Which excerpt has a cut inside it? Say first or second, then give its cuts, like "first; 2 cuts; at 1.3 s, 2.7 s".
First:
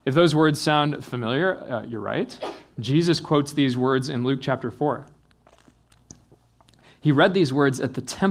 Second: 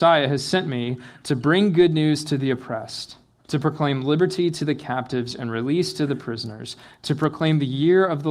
second; 1 cut; at 3.4 s